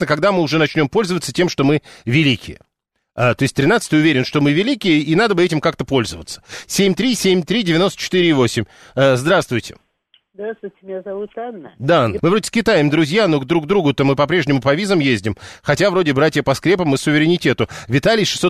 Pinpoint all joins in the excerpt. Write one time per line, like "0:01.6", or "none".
0:12.2